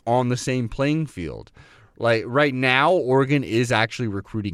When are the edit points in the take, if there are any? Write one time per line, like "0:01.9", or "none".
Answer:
none